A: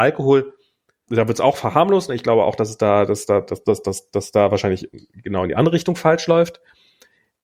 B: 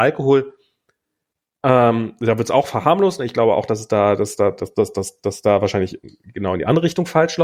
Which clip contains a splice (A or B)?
A